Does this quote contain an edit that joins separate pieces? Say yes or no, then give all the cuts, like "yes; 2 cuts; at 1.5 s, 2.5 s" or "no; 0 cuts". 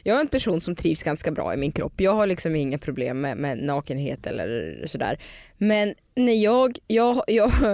no; 0 cuts